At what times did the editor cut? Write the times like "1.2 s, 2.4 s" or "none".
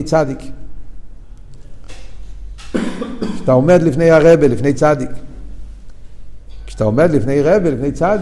none